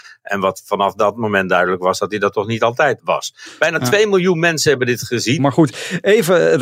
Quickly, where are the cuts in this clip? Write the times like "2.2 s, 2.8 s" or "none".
3.0 s, 5.4 s